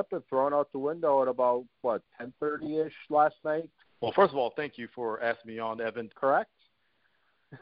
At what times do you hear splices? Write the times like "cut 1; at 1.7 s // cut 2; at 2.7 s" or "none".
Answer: cut 1; at 3.8 s // cut 2; at 6.1 s

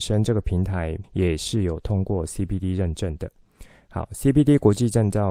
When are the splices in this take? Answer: cut 1; at 1.0 s

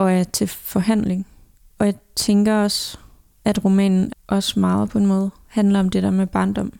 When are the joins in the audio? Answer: cut 1; at 4.1 s

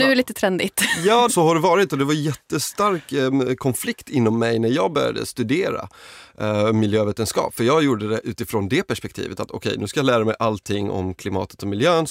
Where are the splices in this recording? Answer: cut 1; at 1.3 s

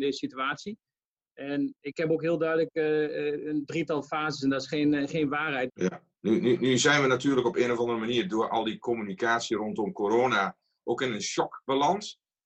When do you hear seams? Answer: cut 1; at 5.7 s

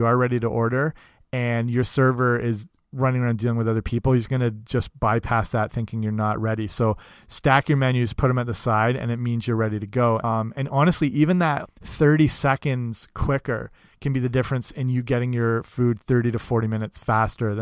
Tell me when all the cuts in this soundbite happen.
cut 1; at 10.2 s // cut 2; at 11.6 s

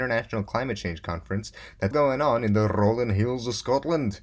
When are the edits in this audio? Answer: cut 1; at 1.9 s

